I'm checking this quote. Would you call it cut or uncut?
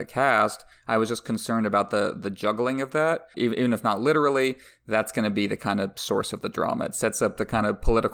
cut